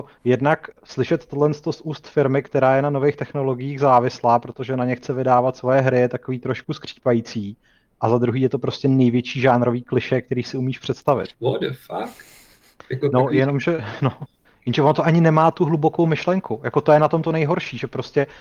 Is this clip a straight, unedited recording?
no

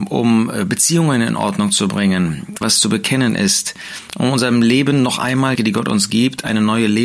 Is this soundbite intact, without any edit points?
no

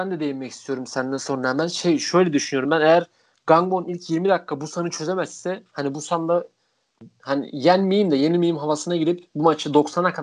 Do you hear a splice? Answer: no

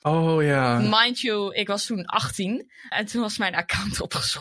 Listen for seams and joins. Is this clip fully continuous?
no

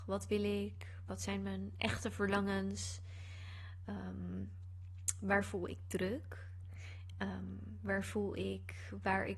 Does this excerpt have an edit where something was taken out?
no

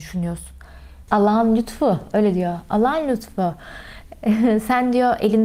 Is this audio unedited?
no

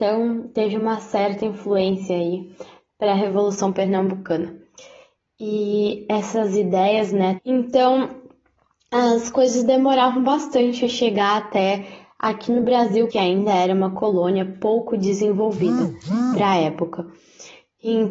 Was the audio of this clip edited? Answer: yes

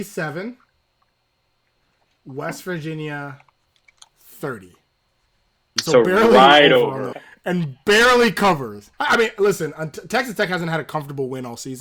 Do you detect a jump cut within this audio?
yes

